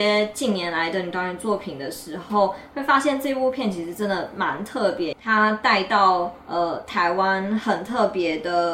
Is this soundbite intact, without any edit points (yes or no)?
no